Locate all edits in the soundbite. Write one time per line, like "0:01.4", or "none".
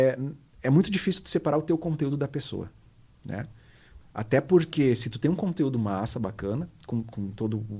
0:04.0